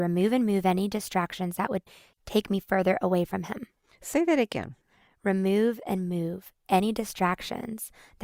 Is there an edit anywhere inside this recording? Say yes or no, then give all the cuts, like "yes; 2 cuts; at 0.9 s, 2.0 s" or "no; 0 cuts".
no; 0 cuts